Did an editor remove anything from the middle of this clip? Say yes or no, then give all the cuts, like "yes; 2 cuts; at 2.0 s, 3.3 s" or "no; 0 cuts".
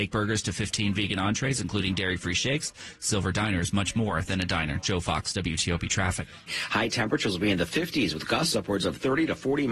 yes; 1 cut; at 6.5 s